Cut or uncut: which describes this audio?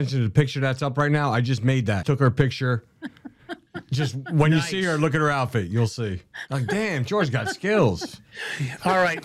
cut